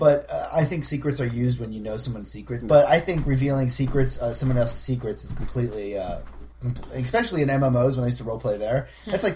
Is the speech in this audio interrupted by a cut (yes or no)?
yes